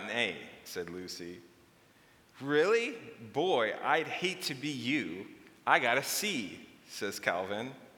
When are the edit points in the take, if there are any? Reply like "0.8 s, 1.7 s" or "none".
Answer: none